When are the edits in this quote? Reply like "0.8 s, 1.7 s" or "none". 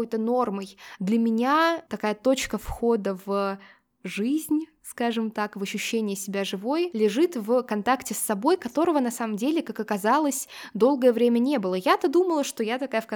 1.0 s

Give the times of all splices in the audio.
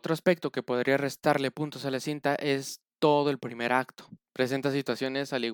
4.3 s

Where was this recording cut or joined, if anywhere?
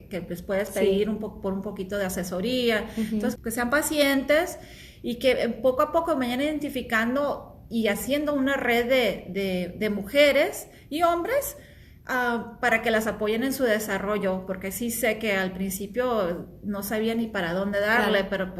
3.4 s

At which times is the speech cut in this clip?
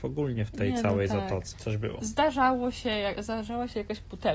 1.5 s, 3.2 s

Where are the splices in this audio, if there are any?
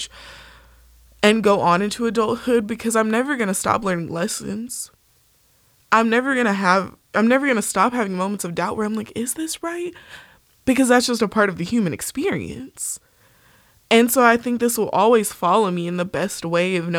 none

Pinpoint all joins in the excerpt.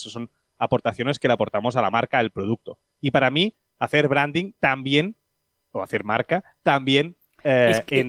none

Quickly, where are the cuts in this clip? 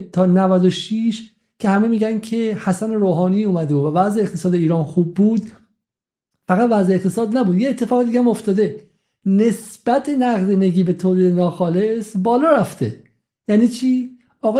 none

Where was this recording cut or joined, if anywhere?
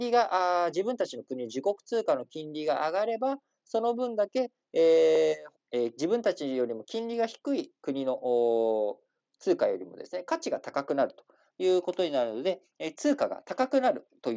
5.5 s, 7.8 s

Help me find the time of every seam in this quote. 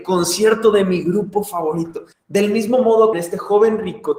2.1 s, 3.1 s

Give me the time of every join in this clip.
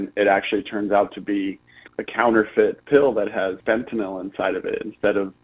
1.9 s, 3.6 s

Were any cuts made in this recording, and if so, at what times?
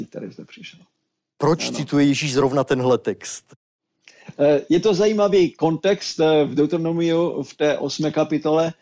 1.4 s

